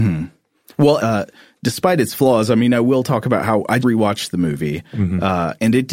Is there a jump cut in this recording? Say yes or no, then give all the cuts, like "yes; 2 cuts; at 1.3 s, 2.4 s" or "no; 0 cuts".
yes; 2 cuts; at 1.0 s, 3.8 s